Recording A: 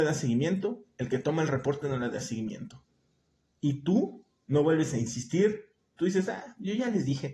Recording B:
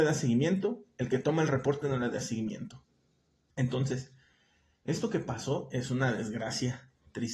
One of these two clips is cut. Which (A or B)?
B